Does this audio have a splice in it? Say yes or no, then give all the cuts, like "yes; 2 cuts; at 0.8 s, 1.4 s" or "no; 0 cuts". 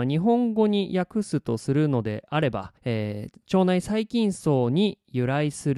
yes; 1 cut; at 2.8 s